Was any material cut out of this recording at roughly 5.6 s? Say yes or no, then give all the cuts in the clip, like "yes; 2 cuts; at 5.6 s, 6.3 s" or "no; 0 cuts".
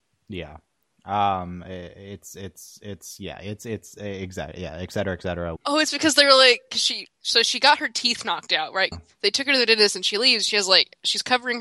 yes; 2 cuts; at 5.6 s, 8.9 s